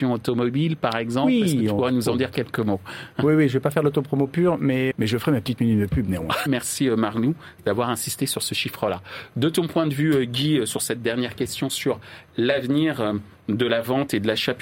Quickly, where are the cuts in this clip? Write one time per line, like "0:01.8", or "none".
0:04.9
0:06.5